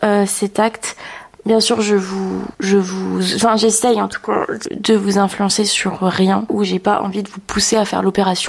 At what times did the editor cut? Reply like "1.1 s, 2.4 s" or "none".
none